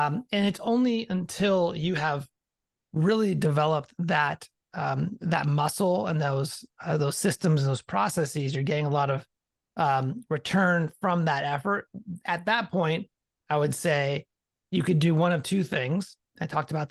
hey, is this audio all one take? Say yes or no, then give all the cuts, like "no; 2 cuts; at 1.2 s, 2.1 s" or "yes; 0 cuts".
yes; 0 cuts